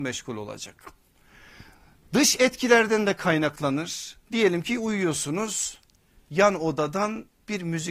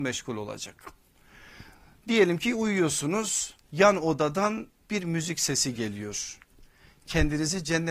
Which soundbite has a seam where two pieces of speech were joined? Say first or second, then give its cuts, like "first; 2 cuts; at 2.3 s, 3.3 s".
second; 2 cuts; at 2.0 s, 3.6 s